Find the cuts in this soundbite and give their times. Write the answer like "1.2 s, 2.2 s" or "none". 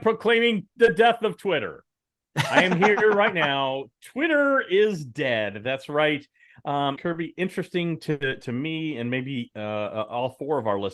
7.0 s